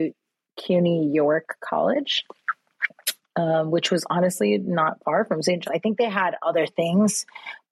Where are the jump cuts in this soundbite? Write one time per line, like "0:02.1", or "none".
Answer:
0:05.6